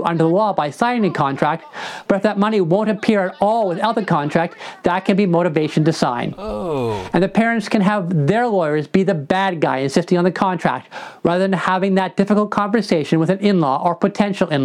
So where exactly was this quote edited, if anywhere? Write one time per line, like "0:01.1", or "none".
none